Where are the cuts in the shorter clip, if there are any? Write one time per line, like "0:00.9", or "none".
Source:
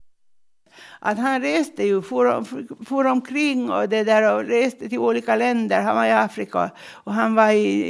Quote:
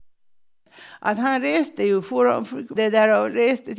0:02.8